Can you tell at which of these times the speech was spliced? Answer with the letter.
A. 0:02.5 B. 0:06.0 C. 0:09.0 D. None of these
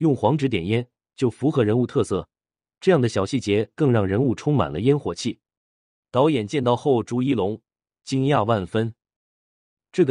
B